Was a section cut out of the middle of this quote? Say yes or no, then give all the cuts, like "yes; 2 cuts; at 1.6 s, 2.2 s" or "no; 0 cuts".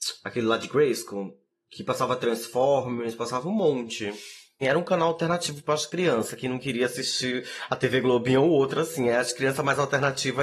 yes; 1 cut; at 4.6 s